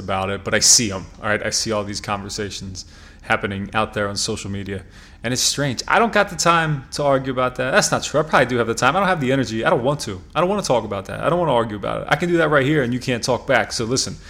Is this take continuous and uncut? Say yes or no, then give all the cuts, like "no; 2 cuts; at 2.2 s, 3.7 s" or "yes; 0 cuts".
yes; 0 cuts